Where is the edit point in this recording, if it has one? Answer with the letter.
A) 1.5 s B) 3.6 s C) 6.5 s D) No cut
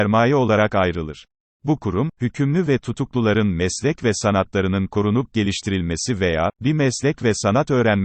A